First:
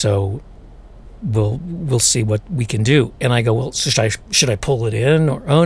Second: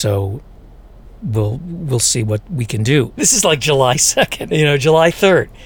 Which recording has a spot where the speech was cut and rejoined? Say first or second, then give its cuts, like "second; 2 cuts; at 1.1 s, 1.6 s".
second; 2 cuts; at 3.2 s, 4.5 s